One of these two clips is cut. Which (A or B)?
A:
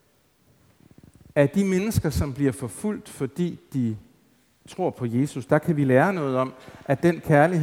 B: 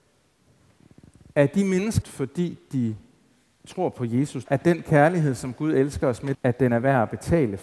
B